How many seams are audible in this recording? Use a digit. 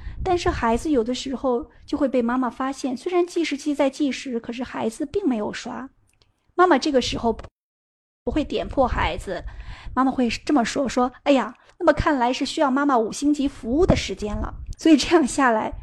2